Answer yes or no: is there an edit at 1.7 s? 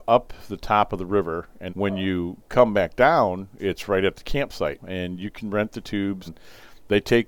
yes